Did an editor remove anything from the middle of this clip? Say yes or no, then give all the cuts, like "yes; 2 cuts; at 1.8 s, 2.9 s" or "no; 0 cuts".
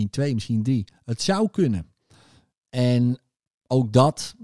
yes; 1 cut; at 2.5 s